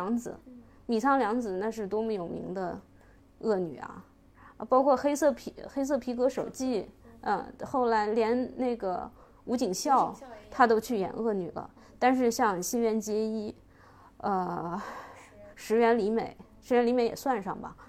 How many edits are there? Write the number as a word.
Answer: zero